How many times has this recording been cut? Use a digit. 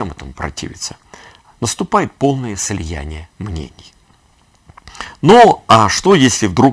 0